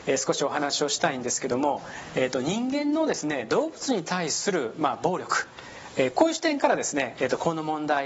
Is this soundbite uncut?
yes; 0 cuts

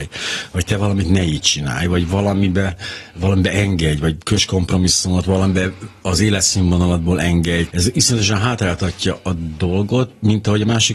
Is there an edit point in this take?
yes; 1 cut; at 7.7 s

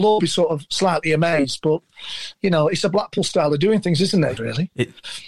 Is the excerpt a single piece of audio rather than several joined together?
no; 1 cut; at 4.4 s

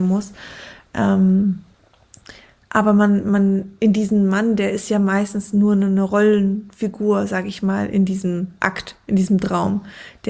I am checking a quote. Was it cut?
no; 0 cuts

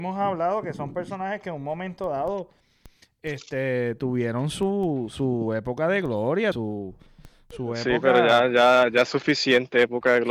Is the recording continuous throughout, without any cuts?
no; 1 cut; at 6.5 s

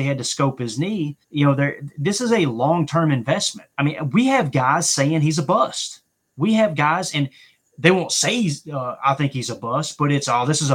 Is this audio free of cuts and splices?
no; 2 cuts; at 1.2 s, 3.7 s

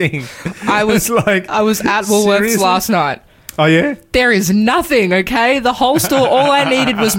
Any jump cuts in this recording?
no; 0 cuts

